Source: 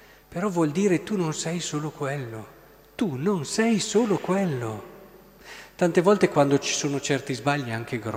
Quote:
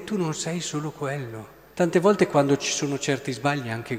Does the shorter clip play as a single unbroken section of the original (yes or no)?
no